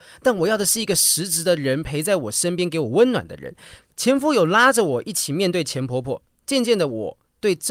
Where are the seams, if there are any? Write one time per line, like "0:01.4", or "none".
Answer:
0:03.8